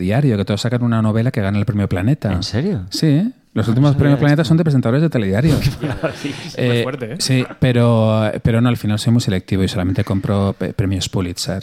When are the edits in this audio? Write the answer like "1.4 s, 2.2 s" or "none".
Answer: none